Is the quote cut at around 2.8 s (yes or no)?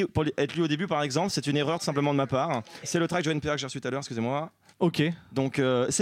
yes